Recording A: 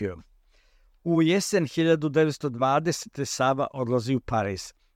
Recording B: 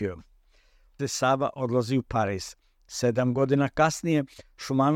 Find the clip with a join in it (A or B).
B